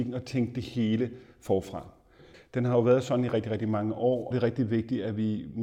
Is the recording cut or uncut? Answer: cut